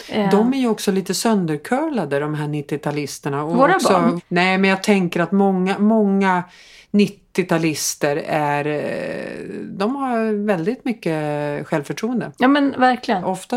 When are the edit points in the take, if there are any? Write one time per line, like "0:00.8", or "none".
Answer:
0:04.2